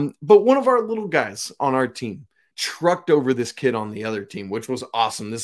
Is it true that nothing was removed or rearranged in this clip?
no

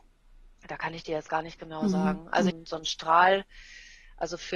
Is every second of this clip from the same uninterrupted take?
no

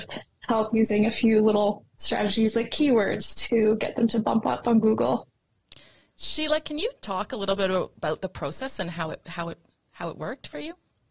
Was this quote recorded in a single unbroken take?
yes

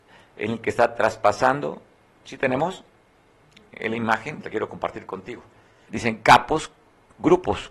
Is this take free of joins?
no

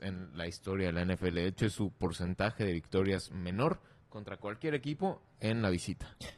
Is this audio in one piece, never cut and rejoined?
yes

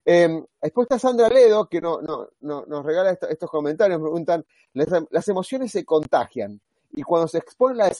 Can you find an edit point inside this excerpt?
no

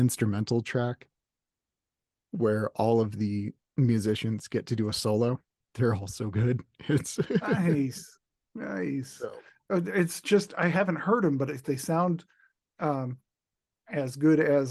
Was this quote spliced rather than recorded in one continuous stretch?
yes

